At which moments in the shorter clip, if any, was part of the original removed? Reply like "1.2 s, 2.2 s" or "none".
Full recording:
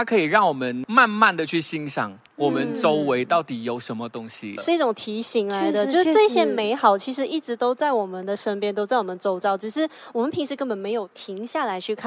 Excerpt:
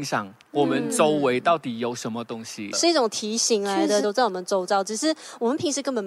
4.0 s